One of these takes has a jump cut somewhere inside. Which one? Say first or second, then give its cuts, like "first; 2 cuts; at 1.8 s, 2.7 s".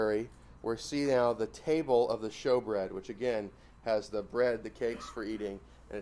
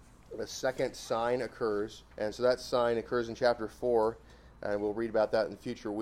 second; 1 cut; at 2.1 s